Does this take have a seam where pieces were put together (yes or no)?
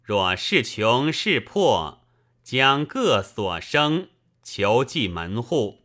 no